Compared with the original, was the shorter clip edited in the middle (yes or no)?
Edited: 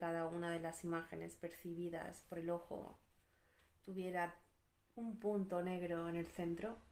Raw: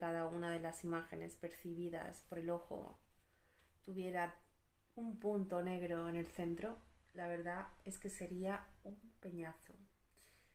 no